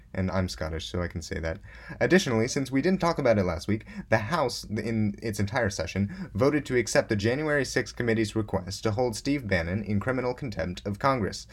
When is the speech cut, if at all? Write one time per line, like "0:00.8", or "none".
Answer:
none